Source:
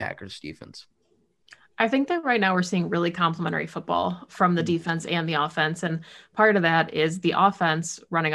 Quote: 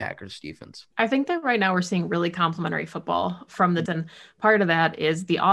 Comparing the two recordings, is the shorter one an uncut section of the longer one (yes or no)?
no